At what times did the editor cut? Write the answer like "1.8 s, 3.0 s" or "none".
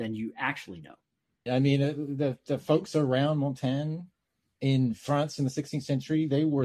1.5 s